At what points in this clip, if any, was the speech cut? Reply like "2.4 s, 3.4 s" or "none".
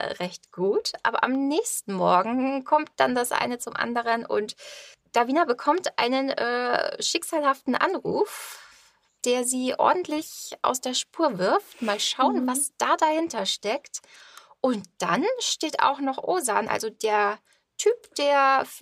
none